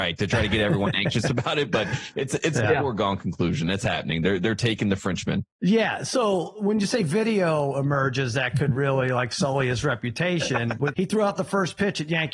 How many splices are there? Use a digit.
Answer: 2